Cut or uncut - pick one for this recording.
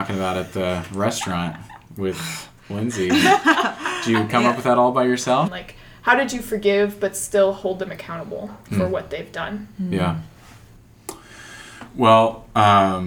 cut